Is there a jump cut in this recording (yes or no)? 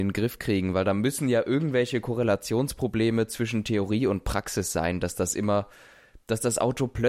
no